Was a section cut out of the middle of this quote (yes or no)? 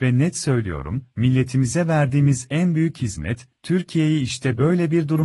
yes